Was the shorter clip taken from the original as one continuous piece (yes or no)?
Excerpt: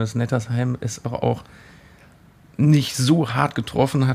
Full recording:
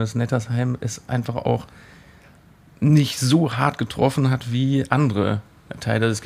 no